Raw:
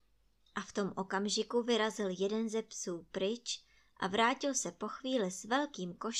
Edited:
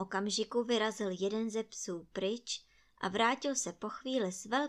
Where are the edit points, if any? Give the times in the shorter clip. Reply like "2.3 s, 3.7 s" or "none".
none